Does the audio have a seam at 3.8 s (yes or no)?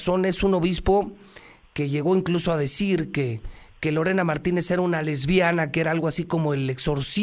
no